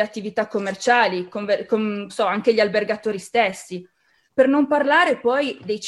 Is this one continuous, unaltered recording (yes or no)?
no